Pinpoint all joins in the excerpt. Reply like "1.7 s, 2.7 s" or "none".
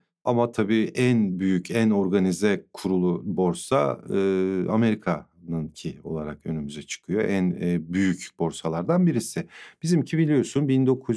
none